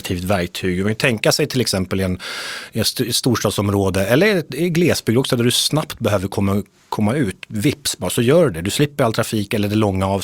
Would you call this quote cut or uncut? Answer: uncut